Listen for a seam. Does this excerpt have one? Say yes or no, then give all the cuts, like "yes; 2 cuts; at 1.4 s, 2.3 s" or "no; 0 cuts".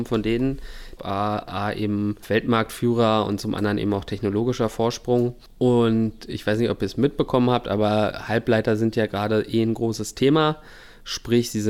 yes; 1 cut; at 1.0 s